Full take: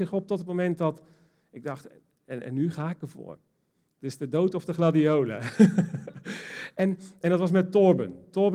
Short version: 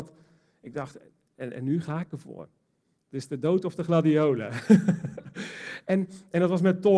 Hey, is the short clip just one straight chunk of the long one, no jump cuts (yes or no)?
yes